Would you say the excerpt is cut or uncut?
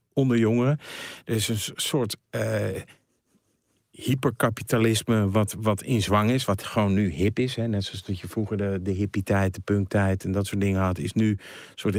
uncut